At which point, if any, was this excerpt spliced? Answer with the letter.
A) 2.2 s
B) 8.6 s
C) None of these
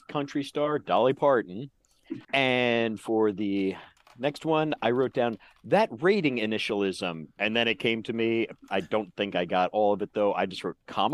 A